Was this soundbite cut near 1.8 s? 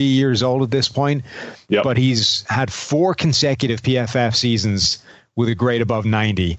no; 0 cuts

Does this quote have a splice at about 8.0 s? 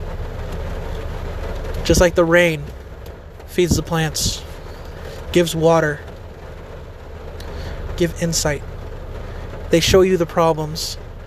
yes; 2 cuts; at 5.3 s, 8.0 s

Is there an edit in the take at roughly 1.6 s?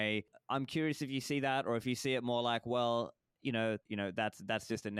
no; 1 cut; at 3.8 s

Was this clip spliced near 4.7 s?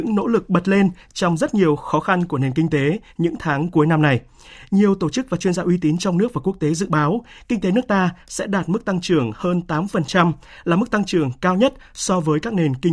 no; 0 cuts

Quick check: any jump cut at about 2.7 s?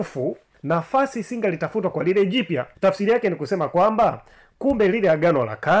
yes; 1 cut; at 2.7 s

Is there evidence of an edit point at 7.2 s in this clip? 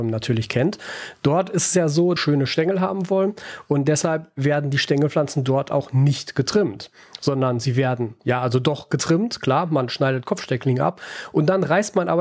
no; 1 cut; at 2.2 s

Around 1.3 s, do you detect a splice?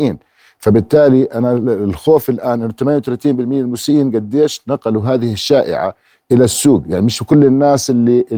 no; 0 cuts

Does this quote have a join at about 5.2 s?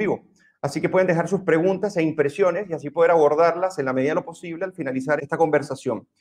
yes; 1 cut; at 5.2 s

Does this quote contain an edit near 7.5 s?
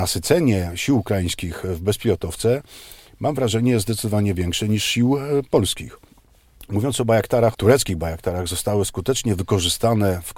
yes; 1 cut; at 7.5 s

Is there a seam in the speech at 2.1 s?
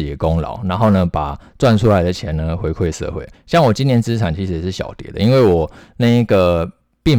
no; 1 cut; at 3.3 s

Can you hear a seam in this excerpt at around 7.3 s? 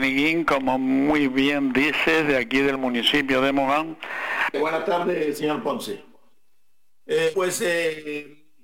yes; 2 cuts; at 4.5 s, 7.3 s

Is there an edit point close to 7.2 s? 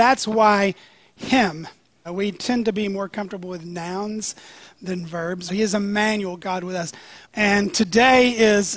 yes; 3 cuts; at 2.1 s, 5.5 s, 7.2 s

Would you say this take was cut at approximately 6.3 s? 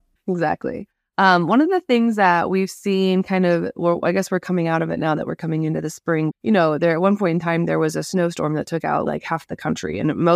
yes; 2 cuts; at 6.3 s, 9.1 s

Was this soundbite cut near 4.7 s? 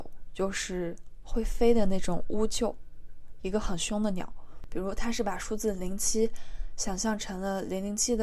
yes; 1 cut; at 4.7 s

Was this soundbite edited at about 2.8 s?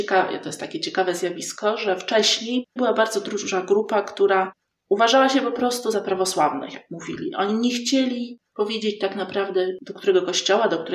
yes; 1 cut; at 2.8 s

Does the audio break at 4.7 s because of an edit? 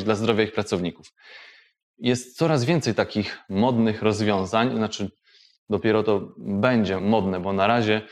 no; 2 cuts; at 1.9 s, 7.0 s

